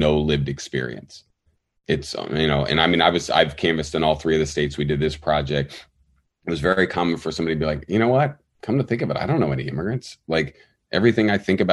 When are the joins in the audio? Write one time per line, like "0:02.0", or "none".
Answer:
none